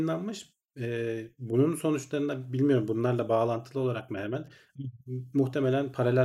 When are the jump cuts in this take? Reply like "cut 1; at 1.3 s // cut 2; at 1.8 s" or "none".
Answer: none

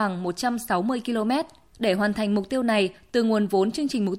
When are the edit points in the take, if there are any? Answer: cut 1; at 1.7 s

